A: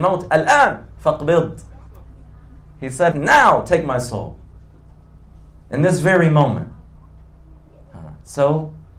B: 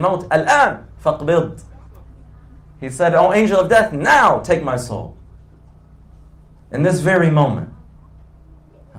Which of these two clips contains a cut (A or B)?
A